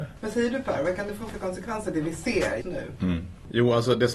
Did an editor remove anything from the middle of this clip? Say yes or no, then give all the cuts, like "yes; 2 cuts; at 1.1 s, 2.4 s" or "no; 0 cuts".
yes; 1 cut; at 2.6 s